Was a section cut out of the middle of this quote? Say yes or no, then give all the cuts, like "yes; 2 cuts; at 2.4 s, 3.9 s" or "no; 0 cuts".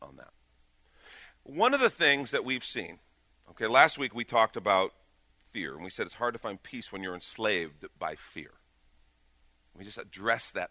no; 0 cuts